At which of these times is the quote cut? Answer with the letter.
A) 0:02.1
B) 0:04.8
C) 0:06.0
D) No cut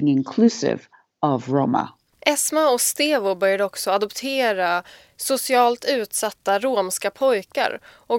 A